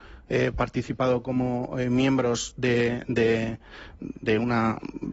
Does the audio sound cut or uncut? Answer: uncut